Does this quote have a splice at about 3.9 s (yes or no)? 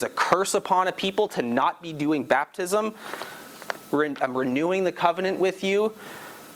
yes